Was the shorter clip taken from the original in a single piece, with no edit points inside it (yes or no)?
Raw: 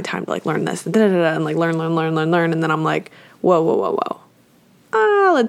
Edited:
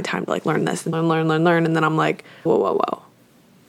no